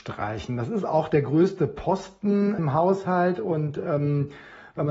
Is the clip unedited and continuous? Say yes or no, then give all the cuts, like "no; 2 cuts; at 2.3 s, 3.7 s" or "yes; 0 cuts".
yes; 0 cuts